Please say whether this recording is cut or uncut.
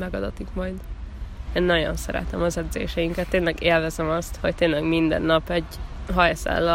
cut